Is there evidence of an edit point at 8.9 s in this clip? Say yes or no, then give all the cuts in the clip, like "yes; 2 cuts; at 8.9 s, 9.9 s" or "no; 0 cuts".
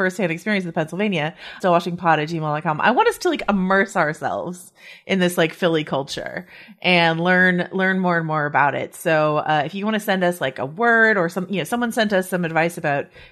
no; 1 cut; at 1.6 s